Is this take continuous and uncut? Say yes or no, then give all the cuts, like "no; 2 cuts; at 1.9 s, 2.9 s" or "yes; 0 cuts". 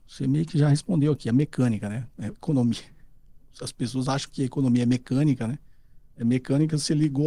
yes; 0 cuts